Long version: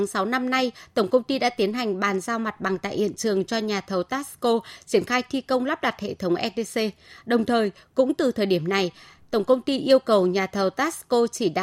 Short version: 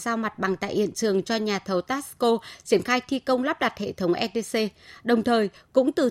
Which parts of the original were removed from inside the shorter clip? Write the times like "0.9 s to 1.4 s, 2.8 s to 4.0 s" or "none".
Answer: none